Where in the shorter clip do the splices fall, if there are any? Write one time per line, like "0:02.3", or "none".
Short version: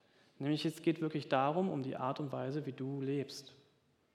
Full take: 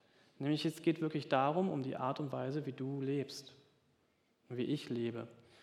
none